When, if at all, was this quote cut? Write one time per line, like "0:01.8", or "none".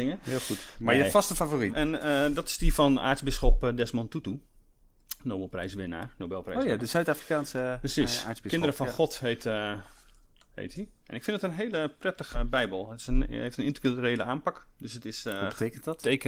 0:01.7
0:12.3